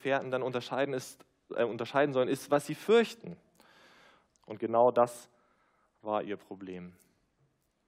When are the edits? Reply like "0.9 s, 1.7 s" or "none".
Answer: 4.4 s